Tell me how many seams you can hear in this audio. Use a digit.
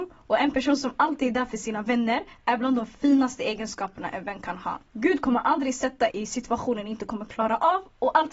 2